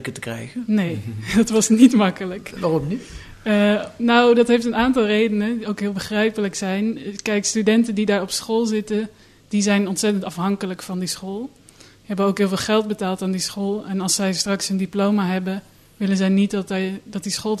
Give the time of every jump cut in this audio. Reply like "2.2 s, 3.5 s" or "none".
none